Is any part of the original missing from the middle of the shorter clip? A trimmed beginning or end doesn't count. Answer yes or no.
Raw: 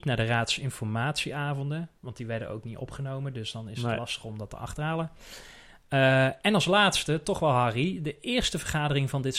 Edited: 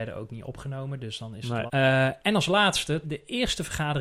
yes